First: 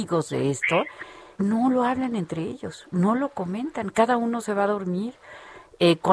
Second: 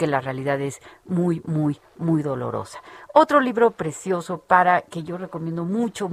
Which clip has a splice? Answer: first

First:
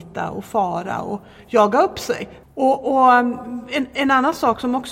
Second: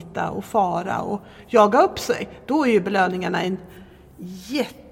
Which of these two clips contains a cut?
first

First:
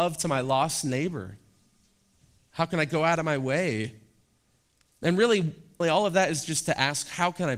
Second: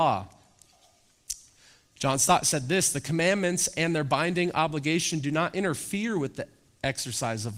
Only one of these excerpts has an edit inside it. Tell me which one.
first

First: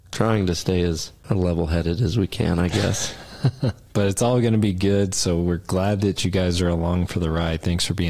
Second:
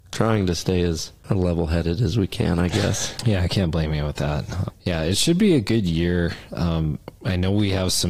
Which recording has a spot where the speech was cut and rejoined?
second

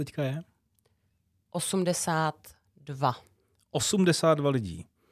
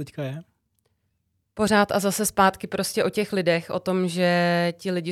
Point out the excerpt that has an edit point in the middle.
second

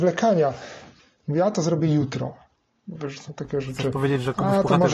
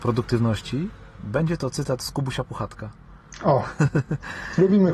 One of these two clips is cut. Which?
first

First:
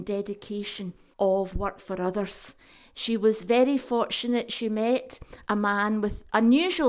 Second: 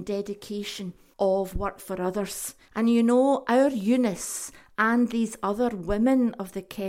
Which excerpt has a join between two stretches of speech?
second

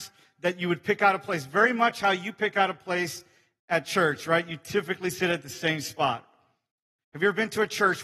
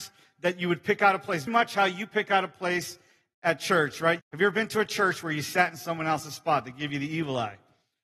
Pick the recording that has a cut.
second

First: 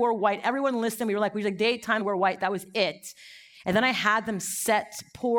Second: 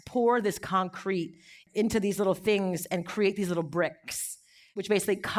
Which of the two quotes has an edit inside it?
first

